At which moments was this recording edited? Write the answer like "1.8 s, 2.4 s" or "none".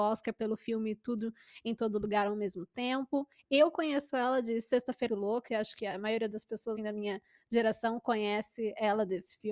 5.1 s, 6.8 s